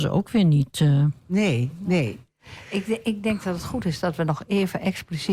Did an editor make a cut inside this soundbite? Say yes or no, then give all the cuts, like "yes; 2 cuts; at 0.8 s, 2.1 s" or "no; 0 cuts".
no; 0 cuts